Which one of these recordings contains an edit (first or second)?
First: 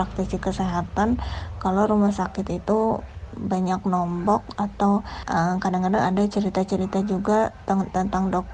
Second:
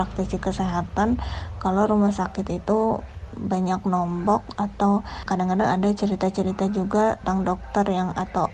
second